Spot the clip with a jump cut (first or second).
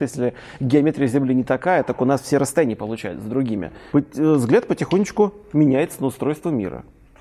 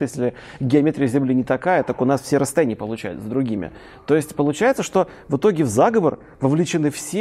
first